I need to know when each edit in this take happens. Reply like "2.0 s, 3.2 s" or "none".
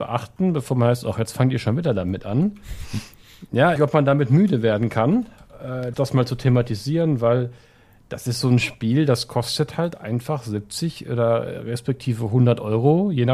3.8 s, 5.9 s